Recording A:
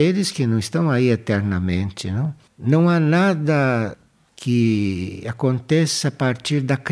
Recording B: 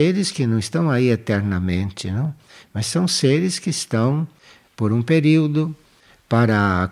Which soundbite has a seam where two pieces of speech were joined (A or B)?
A